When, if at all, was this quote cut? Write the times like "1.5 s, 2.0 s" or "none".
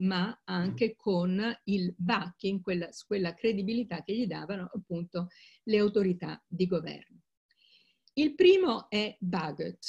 8.1 s

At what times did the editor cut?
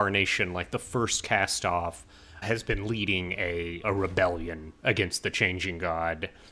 2.4 s, 3.8 s

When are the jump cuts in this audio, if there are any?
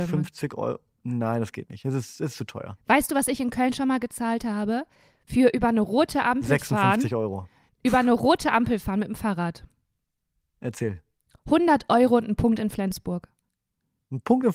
none

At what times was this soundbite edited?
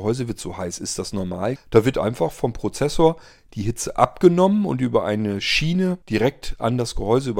1.6 s, 6.0 s

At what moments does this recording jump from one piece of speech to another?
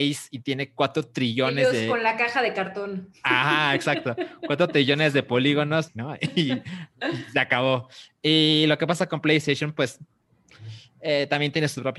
5.9 s

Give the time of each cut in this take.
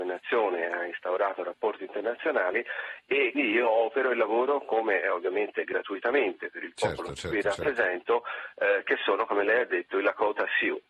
3.3 s

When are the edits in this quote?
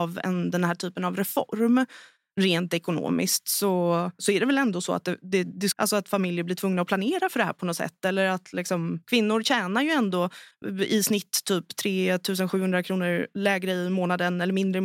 5.7 s

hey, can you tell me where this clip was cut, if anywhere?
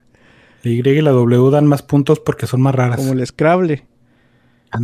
none

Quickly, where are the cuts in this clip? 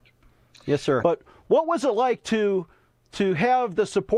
1.0 s

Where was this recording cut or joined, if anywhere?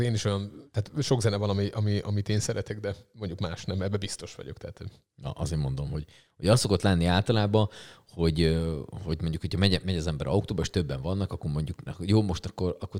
9.8 s, 11.9 s

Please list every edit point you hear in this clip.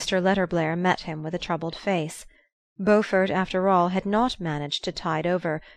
none

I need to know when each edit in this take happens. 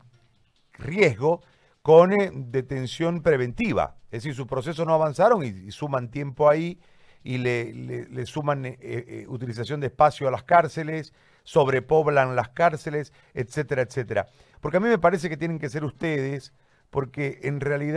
14.5 s

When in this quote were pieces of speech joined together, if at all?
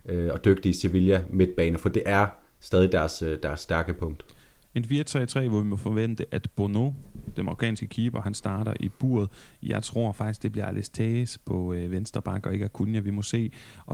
none

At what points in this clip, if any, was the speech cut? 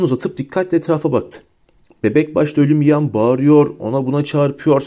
none

